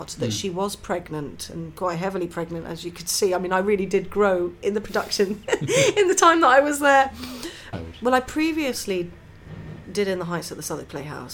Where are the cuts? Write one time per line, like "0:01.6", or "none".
0:07.7

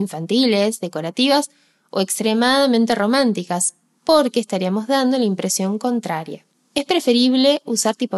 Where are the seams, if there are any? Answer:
none

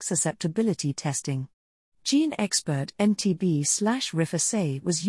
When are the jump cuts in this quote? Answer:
0:01.9

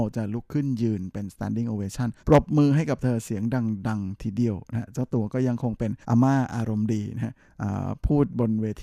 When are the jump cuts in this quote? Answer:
0:02.2
0:06.0

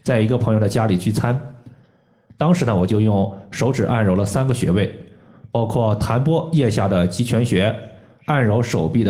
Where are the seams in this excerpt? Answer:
0:02.3

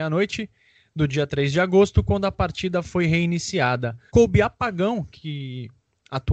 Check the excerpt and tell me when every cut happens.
0:04.1

